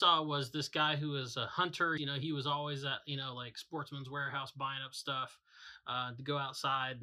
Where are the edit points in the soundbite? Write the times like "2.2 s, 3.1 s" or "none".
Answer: 2.0 s